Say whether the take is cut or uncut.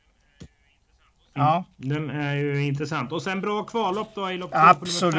cut